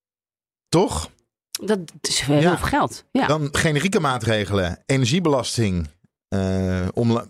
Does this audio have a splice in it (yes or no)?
no